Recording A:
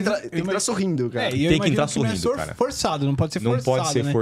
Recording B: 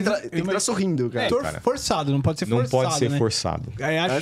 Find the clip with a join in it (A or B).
B